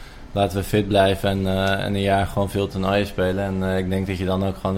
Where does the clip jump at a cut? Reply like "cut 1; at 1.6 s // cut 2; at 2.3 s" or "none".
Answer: none